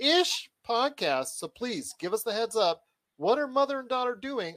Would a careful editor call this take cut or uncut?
uncut